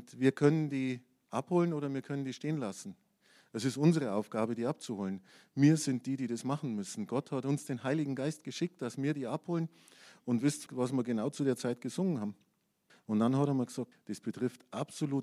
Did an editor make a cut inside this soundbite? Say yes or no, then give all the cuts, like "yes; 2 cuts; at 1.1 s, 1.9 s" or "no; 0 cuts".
yes; 3 cuts; at 10.7 s, 12.9 s, 13.9 s